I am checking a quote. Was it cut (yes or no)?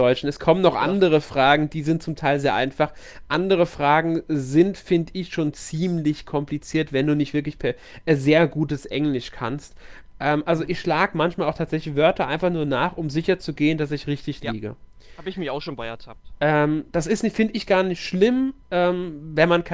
no